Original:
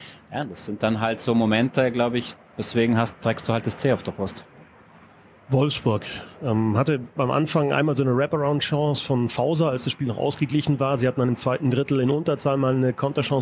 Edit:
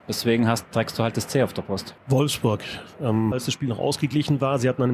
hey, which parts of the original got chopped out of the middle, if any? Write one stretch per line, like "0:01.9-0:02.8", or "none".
0:04.5-0:05.4
0:06.7-0:09.7